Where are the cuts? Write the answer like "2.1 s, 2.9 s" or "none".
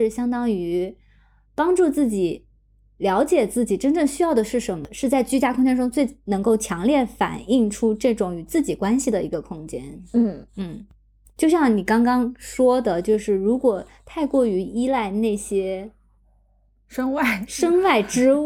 none